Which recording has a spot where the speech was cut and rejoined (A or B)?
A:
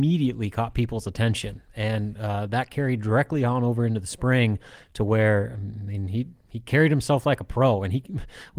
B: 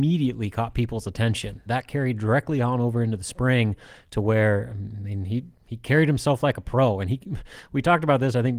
B